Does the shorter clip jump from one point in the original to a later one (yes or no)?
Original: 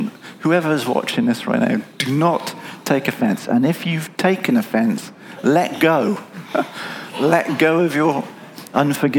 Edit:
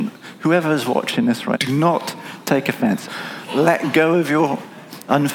yes